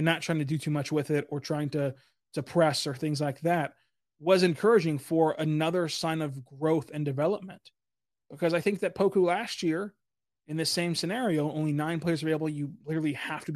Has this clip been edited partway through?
no; 0 cuts

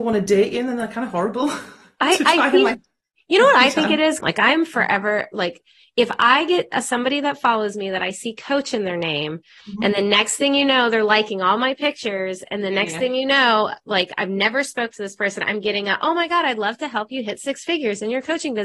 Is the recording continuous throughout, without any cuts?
no; 1 cut; at 4.2 s

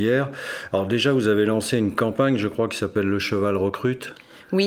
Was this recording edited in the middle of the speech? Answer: no; 0 cuts

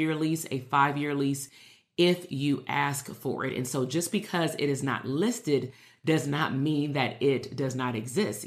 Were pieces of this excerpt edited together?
no; 0 cuts

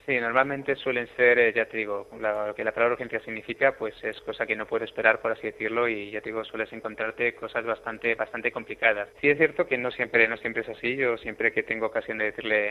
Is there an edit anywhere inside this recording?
yes; 1 cut; at 9.1 s

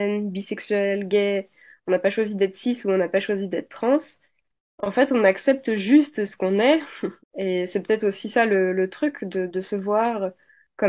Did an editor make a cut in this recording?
yes; 2 cuts; at 7.2 s, 9.5 s

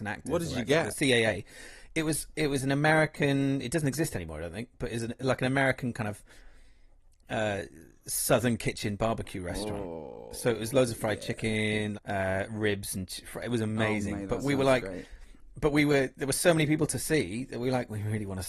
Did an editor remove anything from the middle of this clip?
yes; 1 cut; at 11.9 s

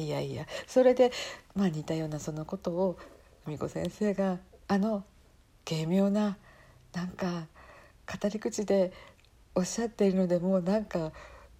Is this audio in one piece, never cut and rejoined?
yes; 0 cuts

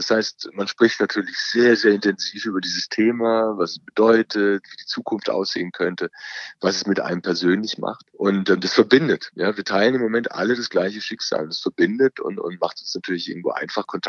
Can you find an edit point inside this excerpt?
yes; 1 cut; at 8.1 s

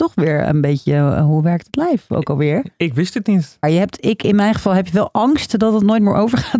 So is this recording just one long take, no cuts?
no; 1 cut; at 3.6 s

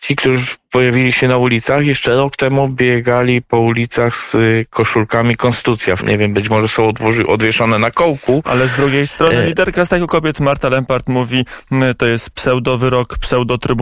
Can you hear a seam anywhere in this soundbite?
yes; 1 cut; at 6.0 s

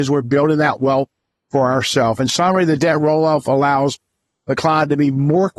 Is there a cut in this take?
no; 0 cuts

